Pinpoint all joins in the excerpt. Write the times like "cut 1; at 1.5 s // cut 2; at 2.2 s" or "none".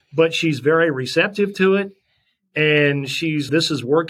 none